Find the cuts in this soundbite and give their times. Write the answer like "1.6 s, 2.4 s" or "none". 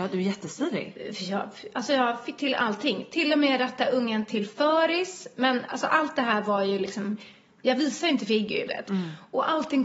8.7 s